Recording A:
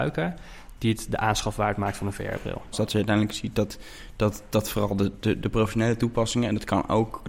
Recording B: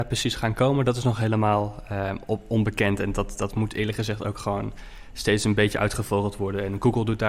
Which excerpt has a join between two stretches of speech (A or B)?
A